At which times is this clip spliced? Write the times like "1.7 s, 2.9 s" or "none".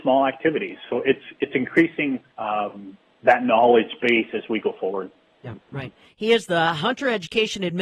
2.3 s, 6.1 s